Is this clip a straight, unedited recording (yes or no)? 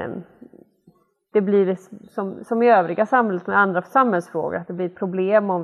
yes